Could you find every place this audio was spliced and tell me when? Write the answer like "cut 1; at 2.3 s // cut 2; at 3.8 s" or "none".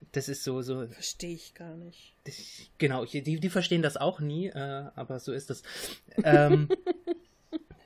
cut 1; at 2.2 s